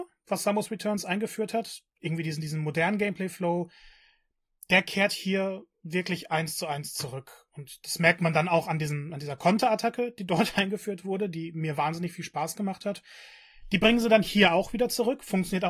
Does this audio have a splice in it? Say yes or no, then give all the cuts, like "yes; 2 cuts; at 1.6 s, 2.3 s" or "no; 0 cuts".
no; 0 cuts